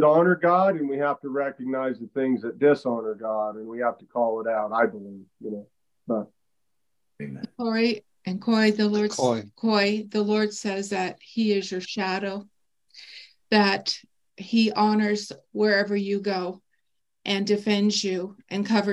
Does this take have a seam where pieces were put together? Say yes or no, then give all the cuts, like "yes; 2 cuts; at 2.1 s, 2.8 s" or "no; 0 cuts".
no; 0 cuts